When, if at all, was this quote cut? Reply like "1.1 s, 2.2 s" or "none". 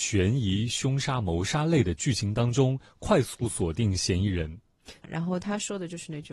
5.0 s